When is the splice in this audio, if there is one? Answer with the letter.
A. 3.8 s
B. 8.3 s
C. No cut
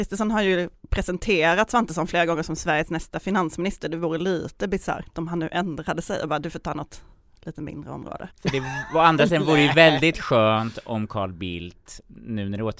B